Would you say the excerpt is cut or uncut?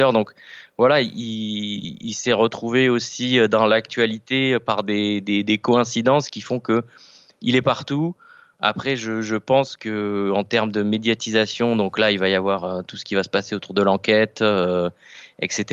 uncut